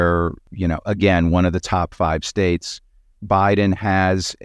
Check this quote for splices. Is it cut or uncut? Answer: uncut